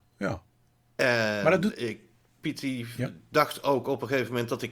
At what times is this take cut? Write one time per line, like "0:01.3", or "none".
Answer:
none